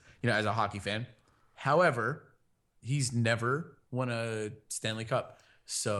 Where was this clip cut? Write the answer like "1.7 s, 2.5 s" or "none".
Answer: 2.8 s

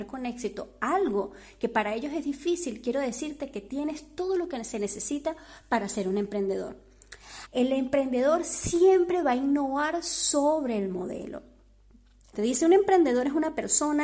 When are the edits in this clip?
7.5 s, 12.3 s

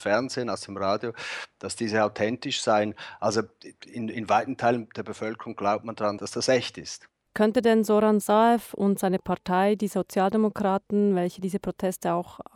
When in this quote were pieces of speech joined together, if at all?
none

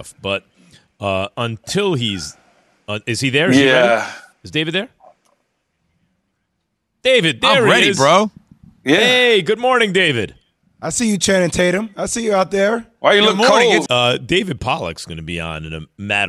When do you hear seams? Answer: 13.9 s

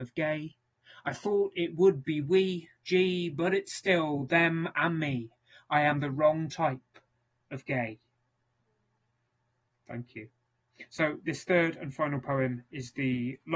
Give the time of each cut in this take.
none

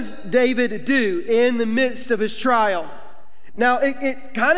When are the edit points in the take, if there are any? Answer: 3.5 s

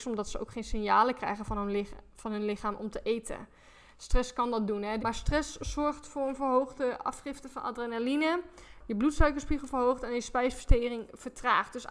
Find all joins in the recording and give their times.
5.0 s

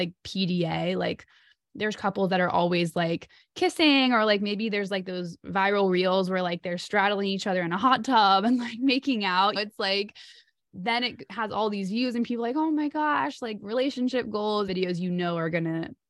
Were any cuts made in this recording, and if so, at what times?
9.6 s, 14.7 s

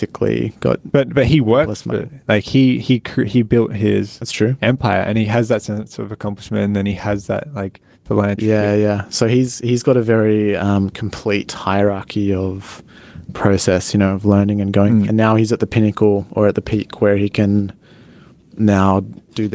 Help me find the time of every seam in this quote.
15.1 s

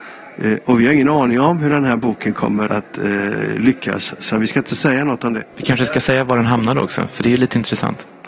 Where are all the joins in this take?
2.7 s

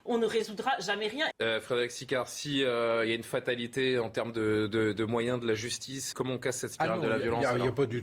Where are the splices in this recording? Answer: 1.3 s, 6.1 s

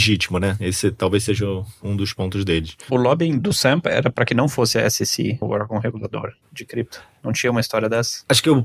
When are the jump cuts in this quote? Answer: 5.4 s

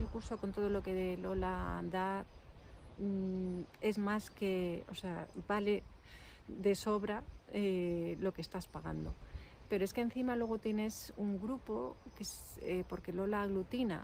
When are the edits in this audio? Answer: none

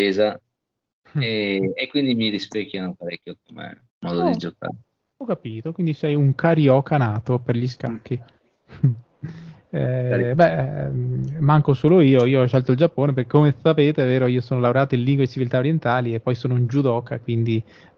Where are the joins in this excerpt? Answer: 3.9 s

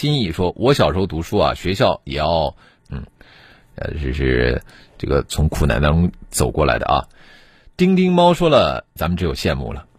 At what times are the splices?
2.8 s, 9.0 s

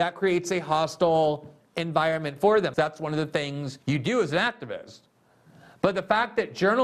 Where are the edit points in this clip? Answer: 2.7 s, 3.8 s

